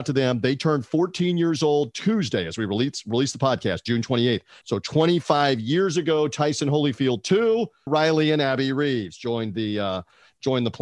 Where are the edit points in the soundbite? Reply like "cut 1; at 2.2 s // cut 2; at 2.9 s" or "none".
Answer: cut 1; at 4.6 s // cut 2; at 7.9 s